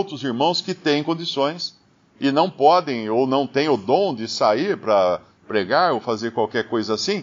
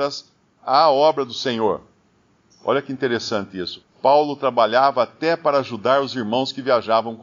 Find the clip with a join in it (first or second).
second